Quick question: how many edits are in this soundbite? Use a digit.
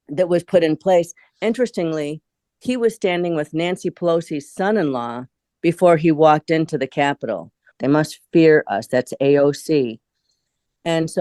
1